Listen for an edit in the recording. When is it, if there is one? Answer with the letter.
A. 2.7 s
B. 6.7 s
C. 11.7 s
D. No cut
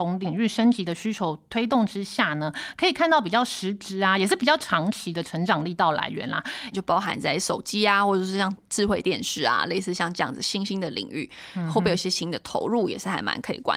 B